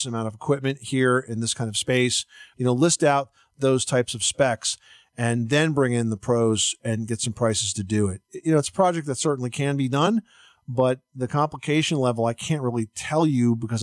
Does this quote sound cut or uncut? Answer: cut